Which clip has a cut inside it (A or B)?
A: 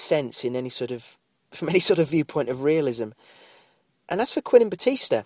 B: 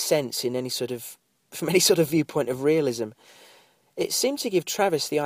B